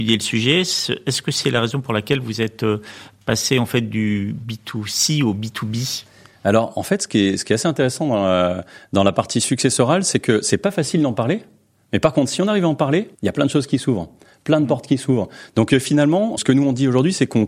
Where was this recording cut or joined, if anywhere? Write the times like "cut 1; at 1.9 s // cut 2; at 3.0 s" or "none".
cut 1; at 13.1 s // cut 2; at 16.4 s